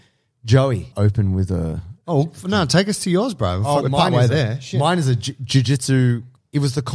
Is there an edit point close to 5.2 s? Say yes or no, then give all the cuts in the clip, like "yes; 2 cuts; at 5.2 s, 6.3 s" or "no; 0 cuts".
no; 2 cuts; at 0.9 s, 3.8 s